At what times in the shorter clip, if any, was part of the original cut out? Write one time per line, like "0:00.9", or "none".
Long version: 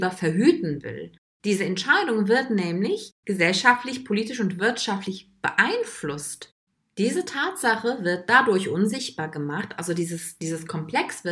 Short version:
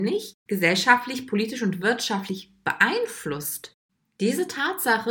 none